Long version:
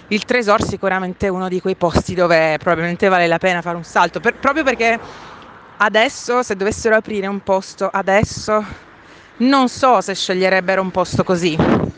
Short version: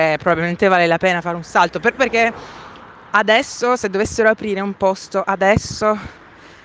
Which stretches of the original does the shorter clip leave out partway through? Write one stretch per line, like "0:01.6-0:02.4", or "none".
0:04.4-0:04.6